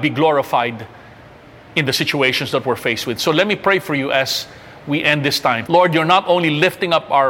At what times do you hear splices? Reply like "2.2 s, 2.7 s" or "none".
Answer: 5.7 s

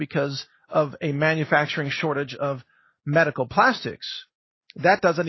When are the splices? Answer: none

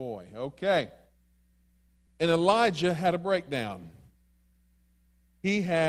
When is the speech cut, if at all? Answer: 2.1 s

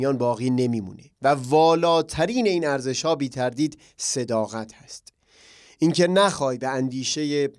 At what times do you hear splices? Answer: 1.1 s

